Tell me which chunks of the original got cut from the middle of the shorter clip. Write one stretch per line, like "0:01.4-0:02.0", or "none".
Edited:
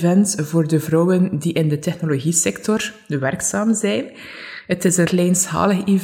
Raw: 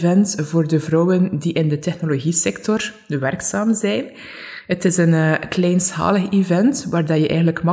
0:05.0-0:05.5

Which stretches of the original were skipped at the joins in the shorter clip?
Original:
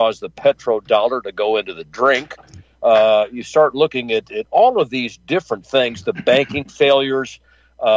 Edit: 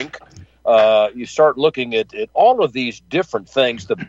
none

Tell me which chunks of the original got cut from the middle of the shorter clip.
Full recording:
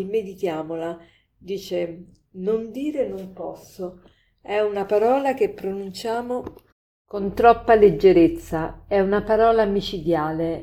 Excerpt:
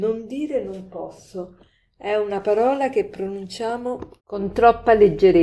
0:06.6-0:07.0

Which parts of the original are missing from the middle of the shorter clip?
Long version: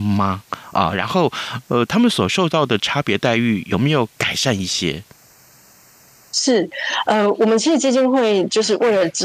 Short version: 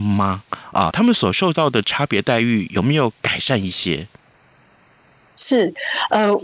0:00.9-0:01.9

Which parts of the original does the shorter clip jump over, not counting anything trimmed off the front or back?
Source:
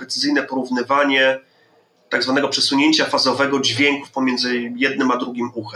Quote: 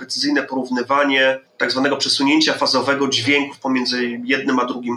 0:01.5-0:02.0

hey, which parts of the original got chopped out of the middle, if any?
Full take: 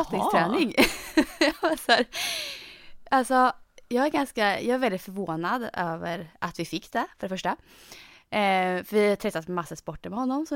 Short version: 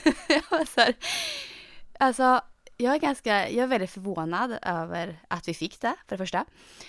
none

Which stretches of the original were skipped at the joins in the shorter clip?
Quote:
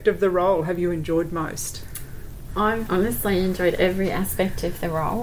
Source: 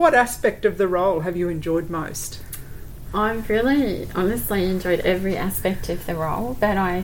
0:03.4-0:04.1

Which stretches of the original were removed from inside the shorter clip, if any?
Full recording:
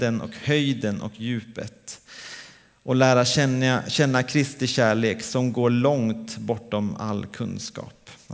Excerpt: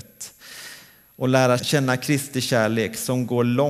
0:03.2-0:03.8

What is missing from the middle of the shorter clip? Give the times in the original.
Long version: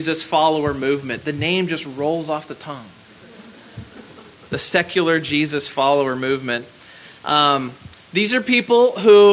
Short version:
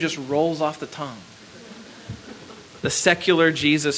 none

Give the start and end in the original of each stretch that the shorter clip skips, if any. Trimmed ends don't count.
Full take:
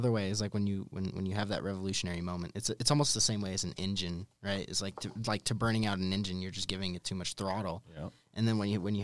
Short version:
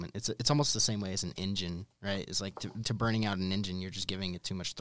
0:05.2-0:05.4

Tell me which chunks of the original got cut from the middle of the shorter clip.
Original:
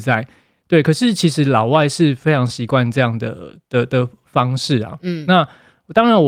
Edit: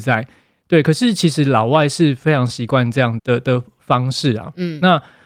0:03.2-0:03.6

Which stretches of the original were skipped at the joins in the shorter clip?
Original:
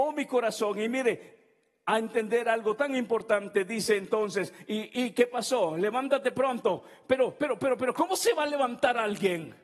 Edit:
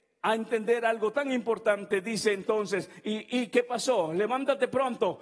none

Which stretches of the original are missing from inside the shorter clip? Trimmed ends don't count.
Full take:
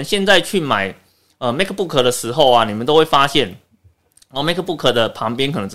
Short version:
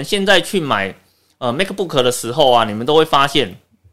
none

